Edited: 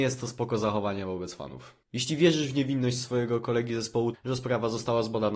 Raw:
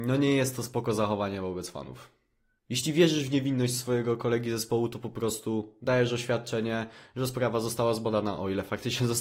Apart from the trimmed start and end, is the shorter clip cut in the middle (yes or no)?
yes